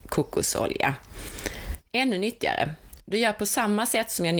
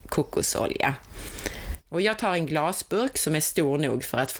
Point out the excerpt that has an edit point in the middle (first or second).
second